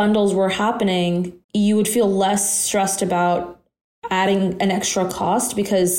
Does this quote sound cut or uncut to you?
cut